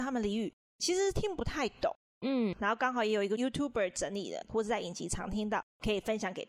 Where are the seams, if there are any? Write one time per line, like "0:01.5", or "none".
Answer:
0:02.5
0:04.5